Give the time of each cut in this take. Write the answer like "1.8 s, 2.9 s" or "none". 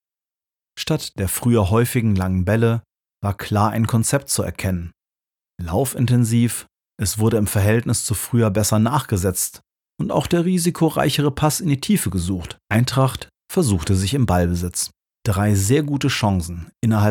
6.9 s, 12.6 s, 15.1 s